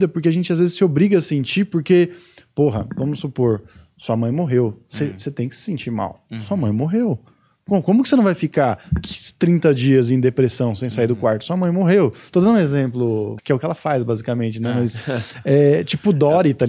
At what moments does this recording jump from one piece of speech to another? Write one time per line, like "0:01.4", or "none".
0:13.4